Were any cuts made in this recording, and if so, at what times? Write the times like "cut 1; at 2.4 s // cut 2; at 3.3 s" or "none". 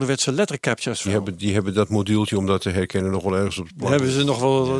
cut 1; at 1.0 s